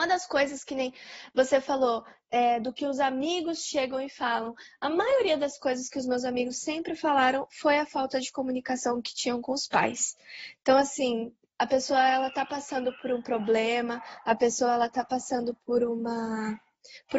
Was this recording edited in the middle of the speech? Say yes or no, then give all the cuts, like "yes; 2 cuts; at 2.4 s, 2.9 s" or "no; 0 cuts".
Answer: no; 0 cuts